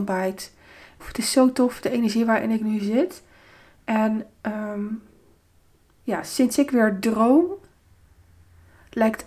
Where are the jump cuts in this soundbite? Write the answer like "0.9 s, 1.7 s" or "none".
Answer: 1.0 s